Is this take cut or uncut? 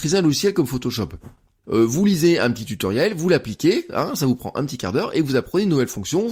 cut